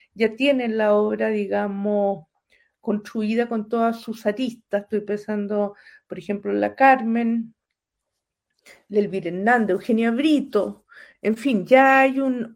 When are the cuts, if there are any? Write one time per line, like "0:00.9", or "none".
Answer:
none